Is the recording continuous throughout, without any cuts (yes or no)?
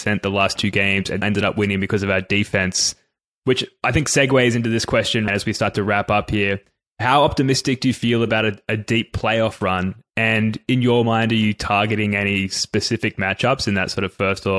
no